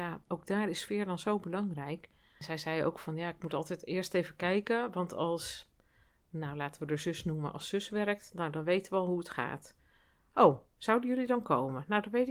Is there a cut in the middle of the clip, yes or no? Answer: no